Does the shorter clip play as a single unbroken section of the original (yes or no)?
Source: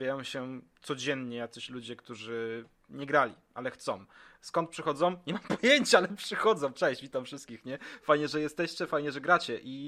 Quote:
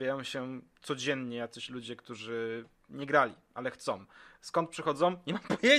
yes